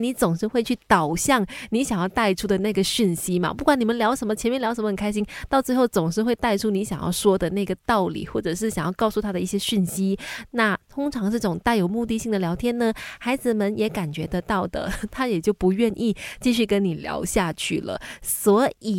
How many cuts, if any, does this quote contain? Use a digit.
0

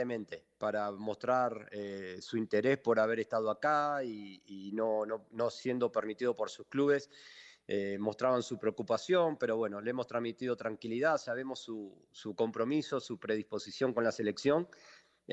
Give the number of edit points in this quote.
0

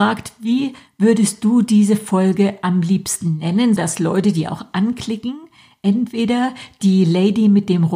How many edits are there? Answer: 1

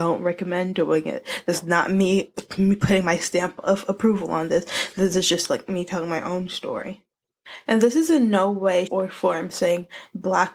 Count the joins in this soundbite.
1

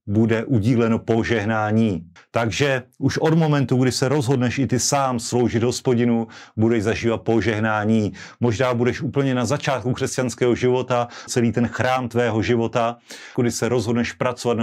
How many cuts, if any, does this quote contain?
3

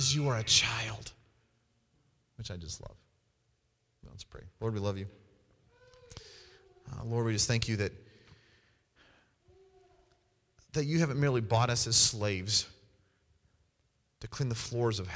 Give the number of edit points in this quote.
0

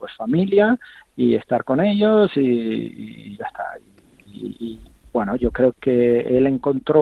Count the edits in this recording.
2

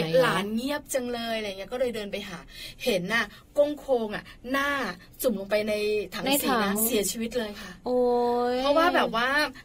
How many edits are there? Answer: 1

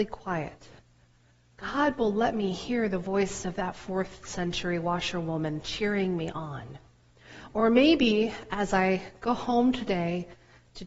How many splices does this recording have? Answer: 0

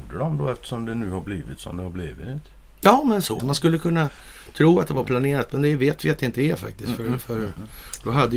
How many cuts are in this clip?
1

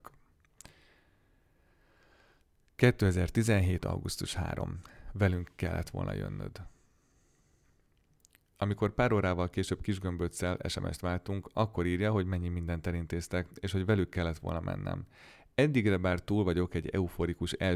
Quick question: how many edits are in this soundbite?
0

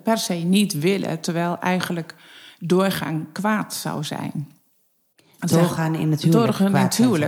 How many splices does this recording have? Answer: 0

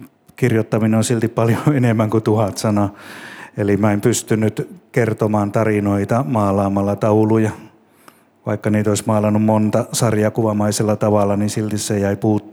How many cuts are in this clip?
0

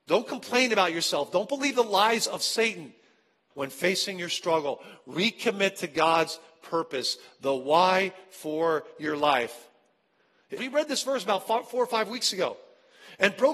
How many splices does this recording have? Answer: 2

